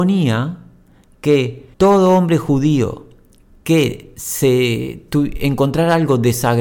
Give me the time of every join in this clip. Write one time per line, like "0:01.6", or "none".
0:01.7